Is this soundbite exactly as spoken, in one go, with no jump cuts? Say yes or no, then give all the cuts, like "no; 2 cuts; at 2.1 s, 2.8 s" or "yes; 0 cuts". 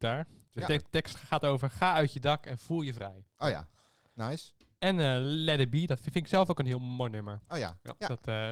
yes; 0 cuts